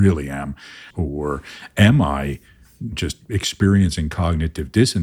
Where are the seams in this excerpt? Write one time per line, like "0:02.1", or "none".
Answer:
0:00.9
0:02.9